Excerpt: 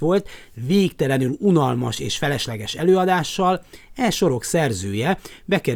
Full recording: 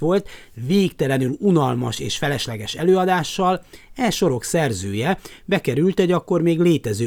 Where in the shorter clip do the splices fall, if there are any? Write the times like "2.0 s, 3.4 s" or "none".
none